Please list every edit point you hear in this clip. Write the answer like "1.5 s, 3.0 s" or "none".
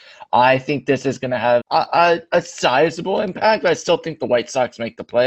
1.6 s